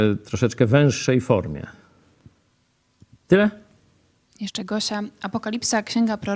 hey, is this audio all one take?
yes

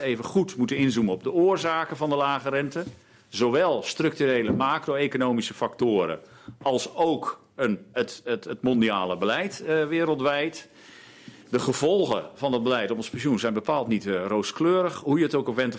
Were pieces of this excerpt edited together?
yes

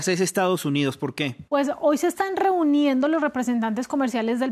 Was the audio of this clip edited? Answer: yes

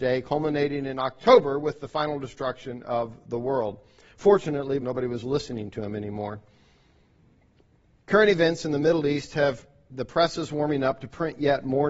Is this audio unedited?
no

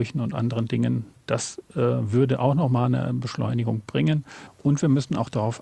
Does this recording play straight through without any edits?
yes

